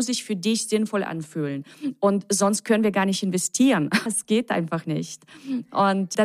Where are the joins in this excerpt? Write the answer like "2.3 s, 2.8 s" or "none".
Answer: 4.1 s